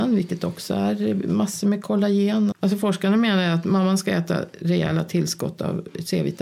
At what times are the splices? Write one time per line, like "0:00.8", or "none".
0:02.5